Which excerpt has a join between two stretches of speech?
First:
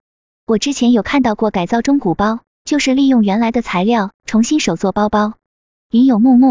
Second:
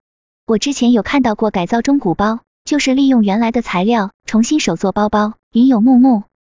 second; 1 cut; at 5.4 s

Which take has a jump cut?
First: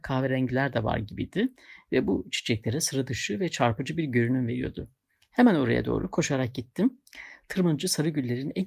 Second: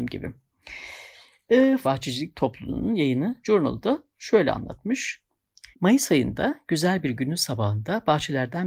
second; 2 cuts; at 1.8 s, 5.7 s

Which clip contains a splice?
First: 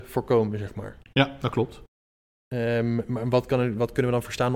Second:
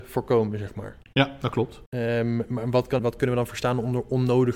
second; 2 cuts; at 1.9 s, 3.0 s

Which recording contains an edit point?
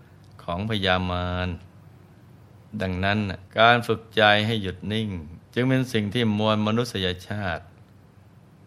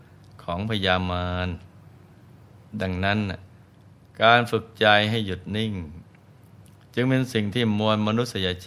first; 2 cuts; at 3.5 s, 5.4 s

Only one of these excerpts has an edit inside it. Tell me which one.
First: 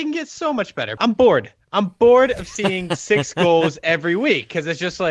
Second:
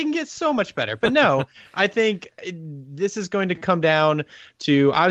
first; 1 cut; at 1.0 s

